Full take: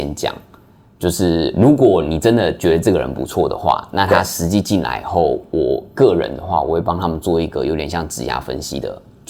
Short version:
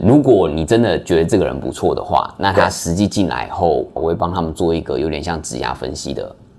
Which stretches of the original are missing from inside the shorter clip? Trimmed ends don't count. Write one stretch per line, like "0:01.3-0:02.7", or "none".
0:05.5-0:06.6